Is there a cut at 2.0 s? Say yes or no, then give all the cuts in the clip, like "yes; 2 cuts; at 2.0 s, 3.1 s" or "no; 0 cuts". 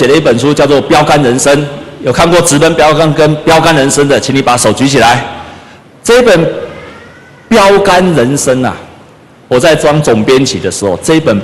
no; 1 cut; at 5.9 s